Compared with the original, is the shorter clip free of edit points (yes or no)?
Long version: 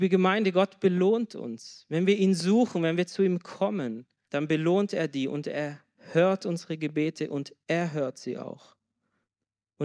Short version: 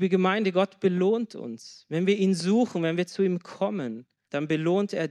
yes